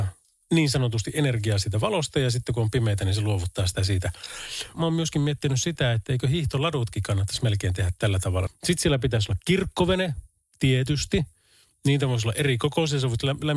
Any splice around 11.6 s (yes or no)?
no